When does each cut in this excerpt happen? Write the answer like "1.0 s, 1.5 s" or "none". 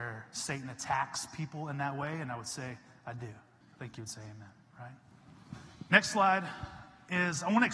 3.6 s